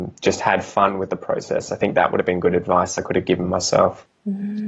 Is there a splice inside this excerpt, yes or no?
no